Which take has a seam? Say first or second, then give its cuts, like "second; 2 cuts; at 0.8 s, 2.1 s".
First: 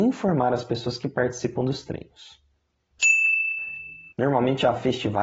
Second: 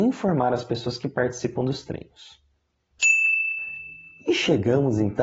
first; 1 cut; at 4.1 s